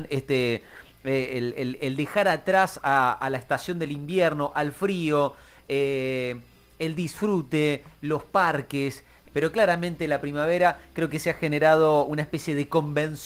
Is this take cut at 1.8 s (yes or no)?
yes